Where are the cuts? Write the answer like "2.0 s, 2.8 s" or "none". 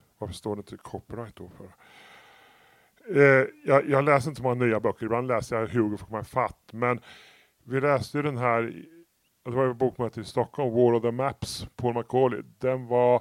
none